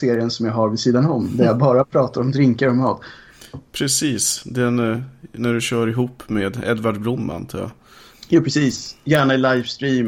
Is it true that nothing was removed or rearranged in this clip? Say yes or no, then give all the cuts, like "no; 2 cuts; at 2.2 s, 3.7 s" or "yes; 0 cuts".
yes; 0 cuts